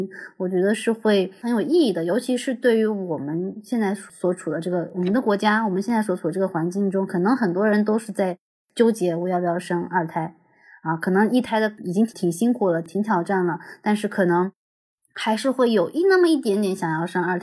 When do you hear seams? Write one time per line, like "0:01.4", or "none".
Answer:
none